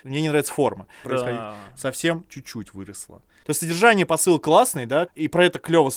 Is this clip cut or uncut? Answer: cut